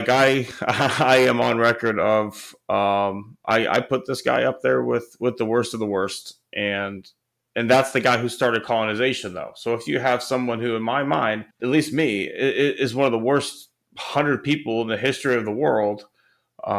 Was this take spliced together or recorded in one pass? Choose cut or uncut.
cut